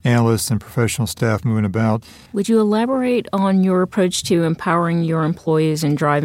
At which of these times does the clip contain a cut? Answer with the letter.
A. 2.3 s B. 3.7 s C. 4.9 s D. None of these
A